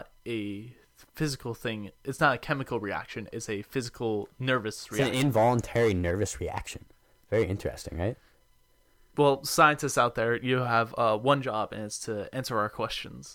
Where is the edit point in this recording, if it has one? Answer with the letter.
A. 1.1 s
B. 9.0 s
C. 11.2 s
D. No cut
D